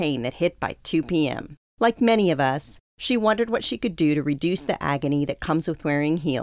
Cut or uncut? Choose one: uncut